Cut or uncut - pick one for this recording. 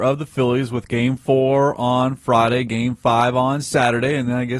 uncut